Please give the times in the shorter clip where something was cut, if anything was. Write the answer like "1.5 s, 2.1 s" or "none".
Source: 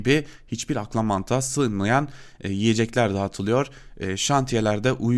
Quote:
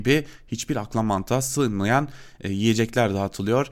none